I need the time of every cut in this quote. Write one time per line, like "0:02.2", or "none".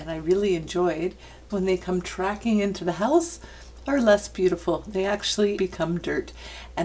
0:01.5
0:05.6